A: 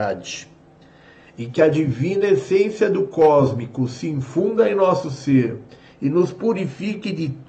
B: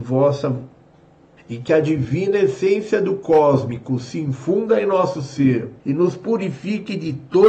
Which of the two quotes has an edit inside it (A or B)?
B